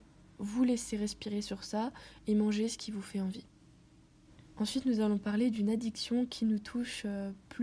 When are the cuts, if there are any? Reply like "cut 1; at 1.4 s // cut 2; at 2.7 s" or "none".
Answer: none